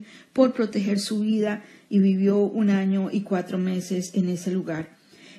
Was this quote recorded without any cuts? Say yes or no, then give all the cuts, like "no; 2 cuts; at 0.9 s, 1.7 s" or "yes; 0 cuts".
yes; 0 cuts